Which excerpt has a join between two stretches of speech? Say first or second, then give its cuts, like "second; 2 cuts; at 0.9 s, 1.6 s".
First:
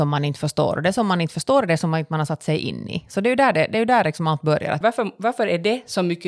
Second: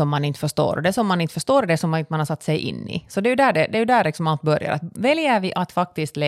first; 1 cut; at 4.8 s